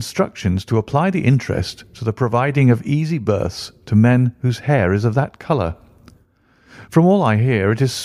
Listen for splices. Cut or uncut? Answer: uncut